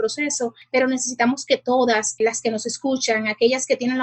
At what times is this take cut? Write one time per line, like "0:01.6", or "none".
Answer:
0:02.2